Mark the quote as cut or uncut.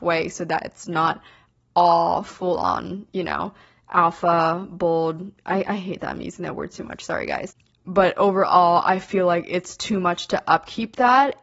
uncut